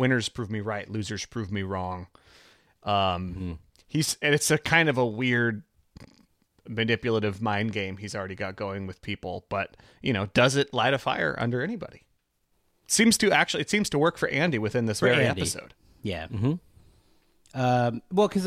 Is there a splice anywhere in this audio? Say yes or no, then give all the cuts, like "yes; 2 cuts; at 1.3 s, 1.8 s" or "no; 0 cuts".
no; 0 cuts